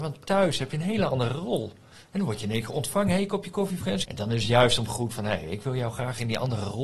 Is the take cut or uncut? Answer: cut